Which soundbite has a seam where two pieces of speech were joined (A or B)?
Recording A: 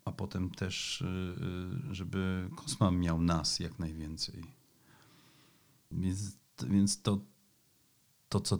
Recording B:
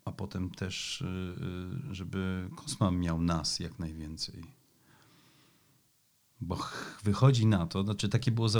A